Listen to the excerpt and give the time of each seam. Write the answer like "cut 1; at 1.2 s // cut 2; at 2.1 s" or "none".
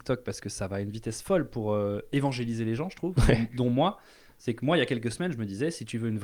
none